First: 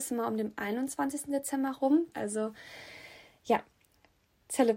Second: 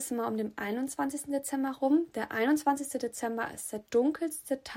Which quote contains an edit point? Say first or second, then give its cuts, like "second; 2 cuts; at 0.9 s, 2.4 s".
first; 1 cut; at 2.1 s